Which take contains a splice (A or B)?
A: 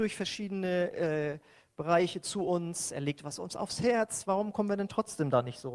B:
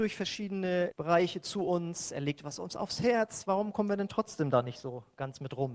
B